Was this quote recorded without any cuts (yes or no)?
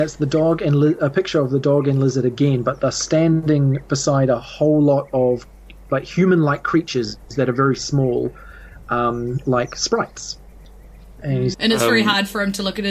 no